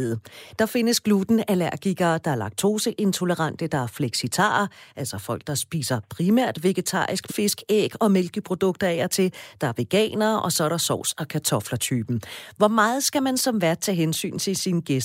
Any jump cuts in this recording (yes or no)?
yes